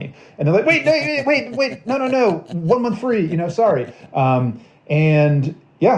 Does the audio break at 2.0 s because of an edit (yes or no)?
no